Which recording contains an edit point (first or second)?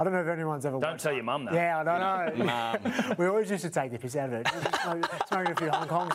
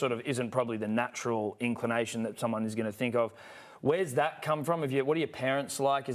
first